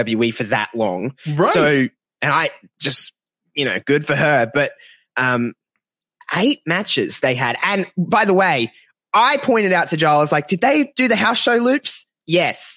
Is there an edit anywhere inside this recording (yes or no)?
no